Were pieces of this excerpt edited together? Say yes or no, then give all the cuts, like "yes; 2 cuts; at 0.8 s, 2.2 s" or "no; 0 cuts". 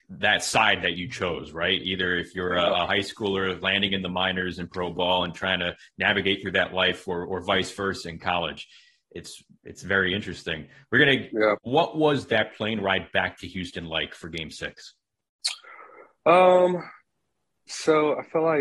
yes; 1 cut; at 11.6 s